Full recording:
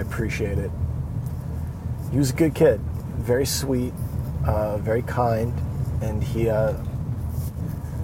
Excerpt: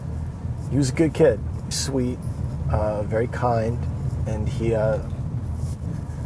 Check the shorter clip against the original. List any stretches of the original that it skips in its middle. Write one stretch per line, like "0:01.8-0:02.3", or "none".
0:03.1-0:03.5